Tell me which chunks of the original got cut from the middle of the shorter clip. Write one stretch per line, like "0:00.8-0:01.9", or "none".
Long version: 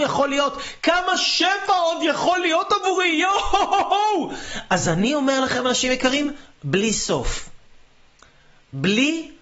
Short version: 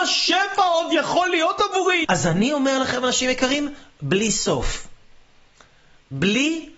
0:03.2-0:04.7